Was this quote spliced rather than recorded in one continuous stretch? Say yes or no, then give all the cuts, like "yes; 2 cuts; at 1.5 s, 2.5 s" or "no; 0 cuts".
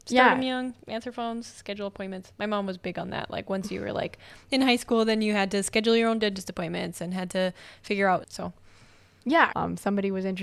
yes; 2 cuts; at 8.2 s, 9.5 s